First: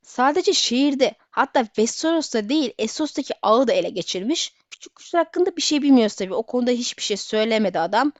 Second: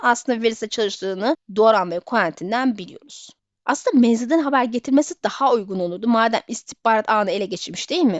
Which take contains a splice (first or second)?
second